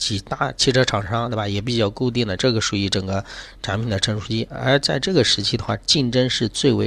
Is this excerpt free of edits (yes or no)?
no